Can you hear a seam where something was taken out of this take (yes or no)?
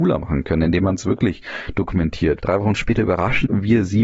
yes